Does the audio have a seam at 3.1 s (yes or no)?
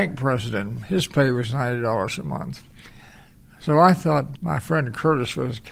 no